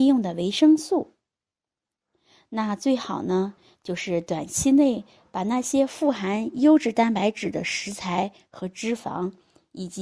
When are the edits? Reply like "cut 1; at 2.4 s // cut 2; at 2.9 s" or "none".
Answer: none